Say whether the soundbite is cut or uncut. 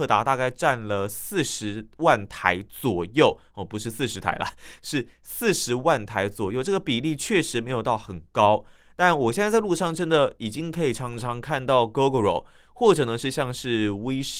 uncut